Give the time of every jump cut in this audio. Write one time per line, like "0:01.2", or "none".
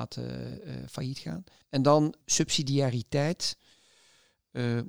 0:01.6